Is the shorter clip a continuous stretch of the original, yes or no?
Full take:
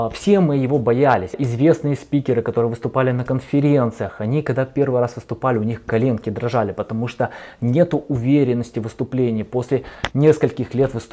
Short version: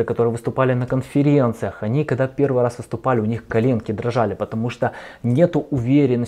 yes